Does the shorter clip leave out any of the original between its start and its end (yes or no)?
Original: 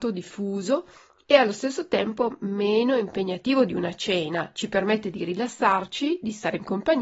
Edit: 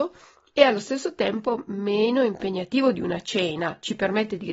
no